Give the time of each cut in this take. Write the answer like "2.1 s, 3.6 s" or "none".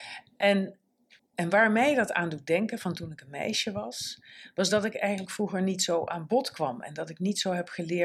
1.2 s